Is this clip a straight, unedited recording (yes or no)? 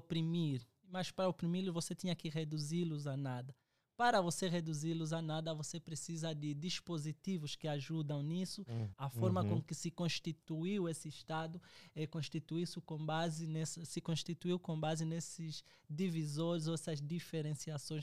no